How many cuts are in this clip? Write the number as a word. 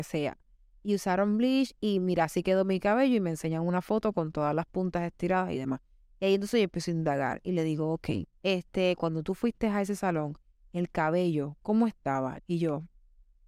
two